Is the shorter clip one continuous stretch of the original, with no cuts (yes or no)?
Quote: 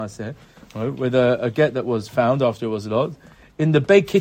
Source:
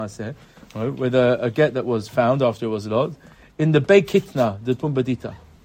yes